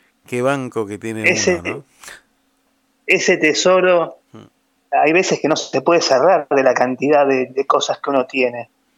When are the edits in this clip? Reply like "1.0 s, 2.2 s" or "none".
4.2 s